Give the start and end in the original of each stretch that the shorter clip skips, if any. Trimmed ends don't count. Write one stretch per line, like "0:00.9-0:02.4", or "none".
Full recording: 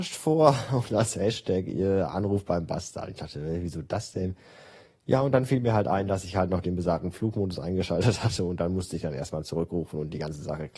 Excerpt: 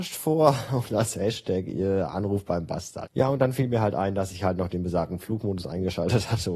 0:03.1-0:05.0